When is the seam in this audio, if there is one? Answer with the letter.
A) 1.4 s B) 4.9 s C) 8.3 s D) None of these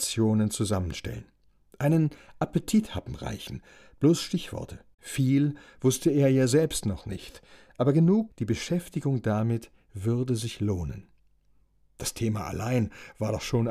C